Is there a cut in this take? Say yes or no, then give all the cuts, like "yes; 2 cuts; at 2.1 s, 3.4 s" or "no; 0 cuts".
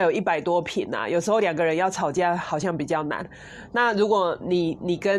no; 0 cuts